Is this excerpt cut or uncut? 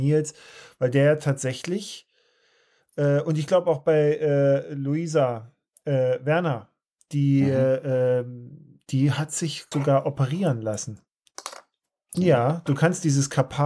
cut